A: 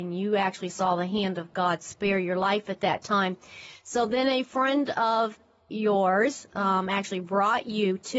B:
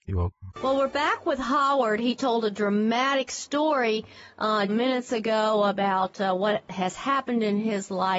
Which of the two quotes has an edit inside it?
B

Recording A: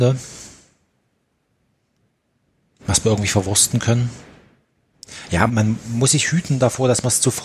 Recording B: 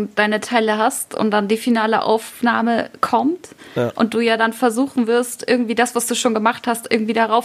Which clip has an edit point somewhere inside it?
A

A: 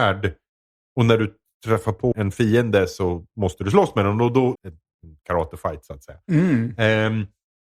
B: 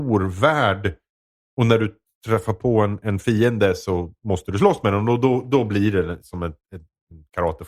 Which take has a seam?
A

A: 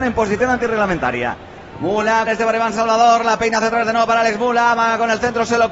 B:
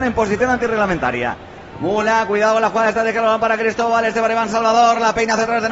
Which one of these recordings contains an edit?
A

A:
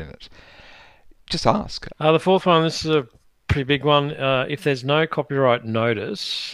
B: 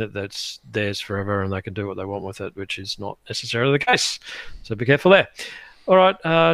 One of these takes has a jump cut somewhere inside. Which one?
A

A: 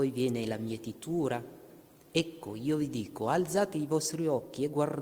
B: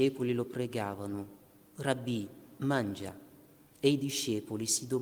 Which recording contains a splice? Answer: B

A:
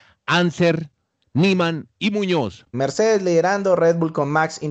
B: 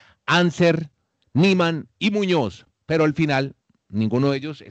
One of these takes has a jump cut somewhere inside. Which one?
A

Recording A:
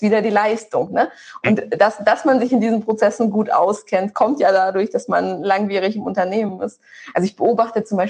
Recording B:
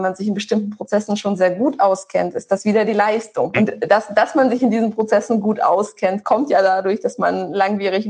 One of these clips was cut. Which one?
B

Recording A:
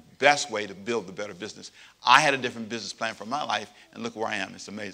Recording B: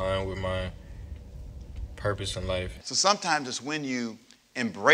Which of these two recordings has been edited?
B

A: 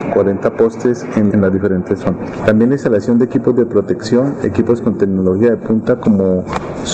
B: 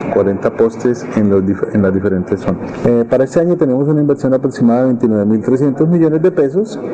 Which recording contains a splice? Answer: A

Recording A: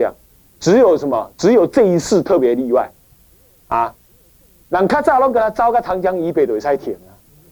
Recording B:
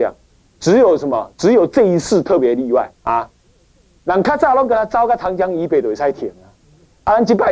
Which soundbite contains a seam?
B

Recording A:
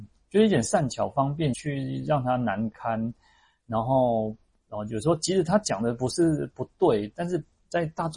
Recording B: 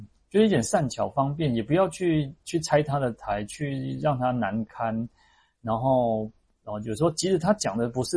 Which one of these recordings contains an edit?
A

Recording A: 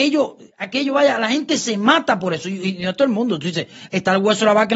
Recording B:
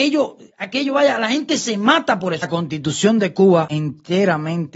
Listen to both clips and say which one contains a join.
B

